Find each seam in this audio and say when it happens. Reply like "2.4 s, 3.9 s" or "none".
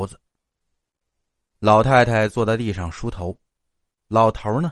none